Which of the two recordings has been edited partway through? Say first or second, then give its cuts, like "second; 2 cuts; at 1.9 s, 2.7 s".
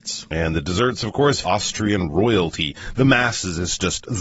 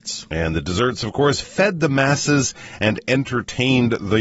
first; 1 cut; at 1.4 s